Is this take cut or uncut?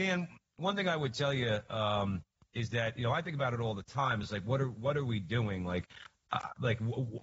uncut